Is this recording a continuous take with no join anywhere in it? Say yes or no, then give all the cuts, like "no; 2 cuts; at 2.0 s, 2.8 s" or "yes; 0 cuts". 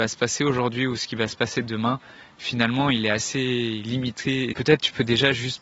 no; 1 cut; at 4.5 s